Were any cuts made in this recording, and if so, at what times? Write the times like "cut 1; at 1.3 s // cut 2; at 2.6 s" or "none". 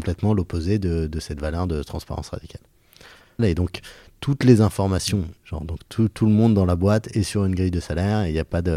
cut 1; at 3.4 s // cut 2; at 5.4 s